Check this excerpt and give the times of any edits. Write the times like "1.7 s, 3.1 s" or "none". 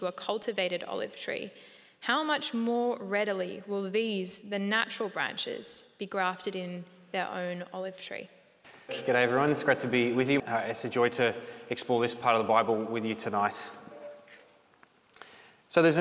8.9 s, 10.4 s

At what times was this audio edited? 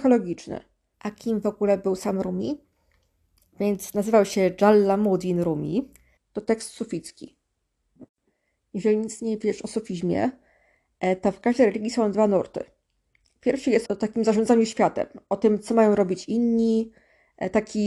0.9 s, 6.2 s, 13.9 s

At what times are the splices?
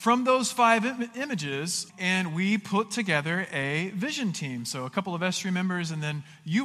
1.9 s

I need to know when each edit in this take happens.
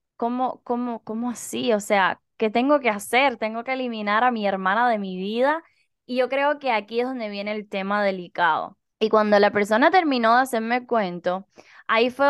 8.9 s

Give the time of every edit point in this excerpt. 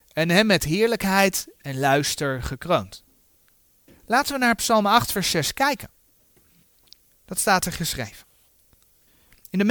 3.9 s, 7.1 s

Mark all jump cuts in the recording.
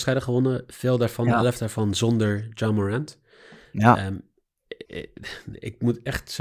4.8 s

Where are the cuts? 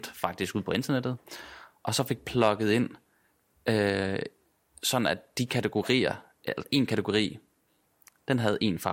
none

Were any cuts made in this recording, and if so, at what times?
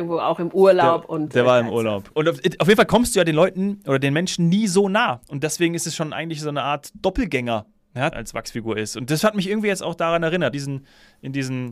2.1 s, 8.1 s, 10.5 s

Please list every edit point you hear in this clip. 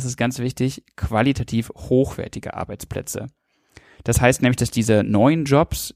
none

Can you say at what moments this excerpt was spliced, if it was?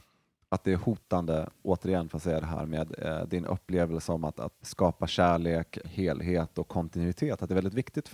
4.6 s, 5.8 s

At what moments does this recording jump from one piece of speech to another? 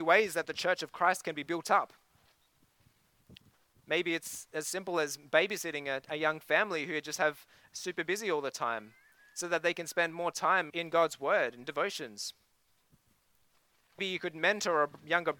10.7 s, 14.0 s

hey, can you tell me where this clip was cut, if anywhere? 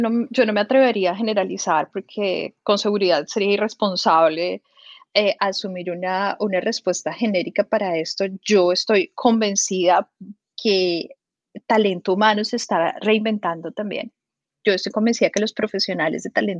10.5 s

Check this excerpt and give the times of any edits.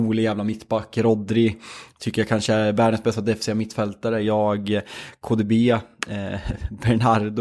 none

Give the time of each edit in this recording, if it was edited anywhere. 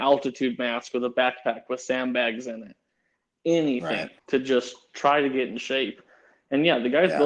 4.2 s

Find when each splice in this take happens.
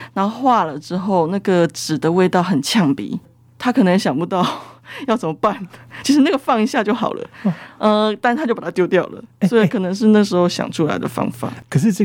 none

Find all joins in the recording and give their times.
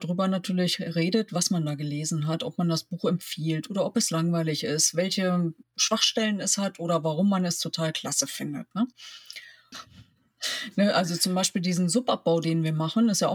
9.7 s

